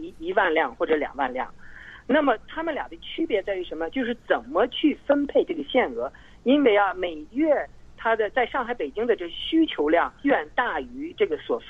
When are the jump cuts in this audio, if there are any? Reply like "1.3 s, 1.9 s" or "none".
10.2 s